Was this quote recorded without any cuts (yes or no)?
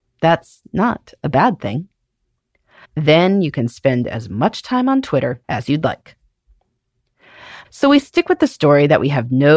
no